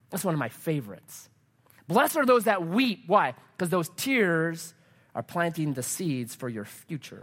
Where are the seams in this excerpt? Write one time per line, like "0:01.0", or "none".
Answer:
none